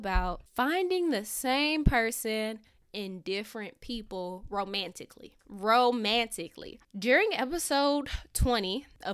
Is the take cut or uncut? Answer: uncut